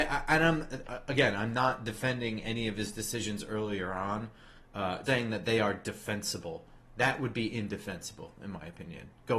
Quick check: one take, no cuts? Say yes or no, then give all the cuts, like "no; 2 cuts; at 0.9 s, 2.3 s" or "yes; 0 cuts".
no; 1 cut; at 5.1 s